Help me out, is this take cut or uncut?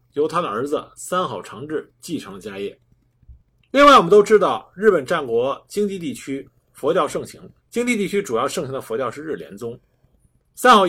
cut